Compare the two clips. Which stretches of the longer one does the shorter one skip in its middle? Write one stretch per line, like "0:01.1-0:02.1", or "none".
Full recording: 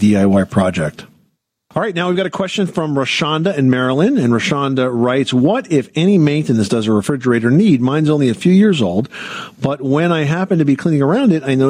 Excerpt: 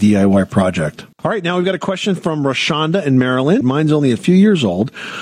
0:01.1-0:01.6
0:04.1-0:07.8